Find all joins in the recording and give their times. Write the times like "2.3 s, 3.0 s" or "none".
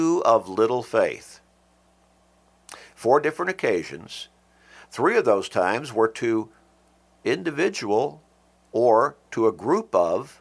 none